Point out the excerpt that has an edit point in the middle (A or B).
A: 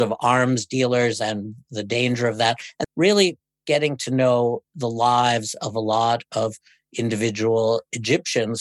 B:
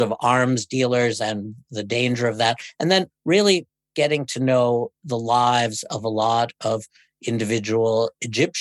A